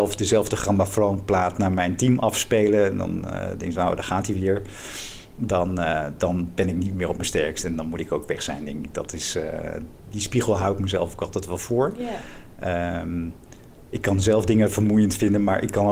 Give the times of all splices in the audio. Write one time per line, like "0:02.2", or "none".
none